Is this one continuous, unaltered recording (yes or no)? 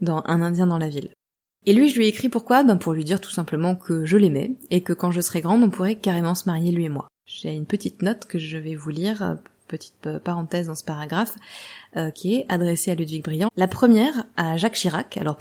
no